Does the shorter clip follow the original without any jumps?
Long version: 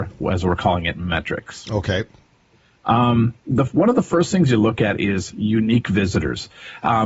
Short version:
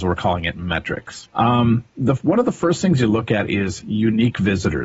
no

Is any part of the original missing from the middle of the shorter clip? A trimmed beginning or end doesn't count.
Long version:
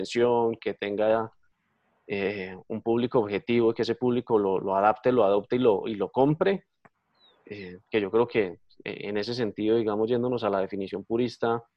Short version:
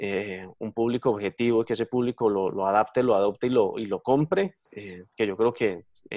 yes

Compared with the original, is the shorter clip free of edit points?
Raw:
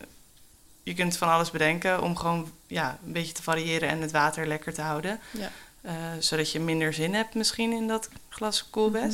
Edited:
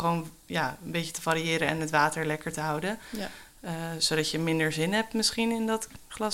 yes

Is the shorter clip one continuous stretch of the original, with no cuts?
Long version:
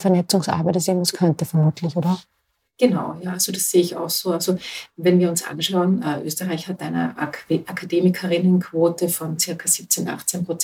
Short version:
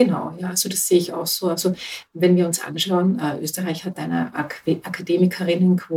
yes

